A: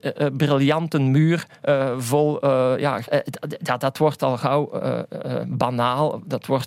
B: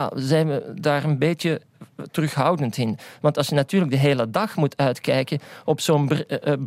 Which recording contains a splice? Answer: A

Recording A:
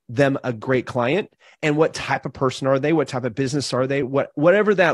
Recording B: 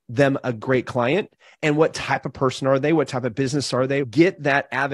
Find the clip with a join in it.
B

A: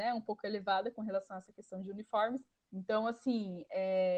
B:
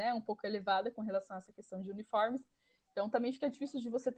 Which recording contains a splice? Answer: A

